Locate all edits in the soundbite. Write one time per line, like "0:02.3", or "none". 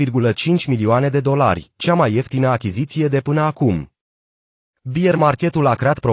0:04.8